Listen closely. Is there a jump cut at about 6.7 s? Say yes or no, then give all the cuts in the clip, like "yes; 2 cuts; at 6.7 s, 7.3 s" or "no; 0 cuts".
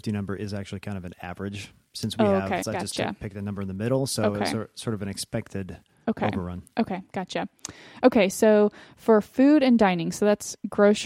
no; 1 cut; at 2.6 s